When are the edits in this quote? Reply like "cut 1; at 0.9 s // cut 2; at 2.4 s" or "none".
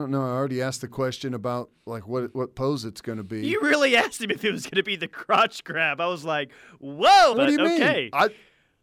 cut 1; at 7.3 s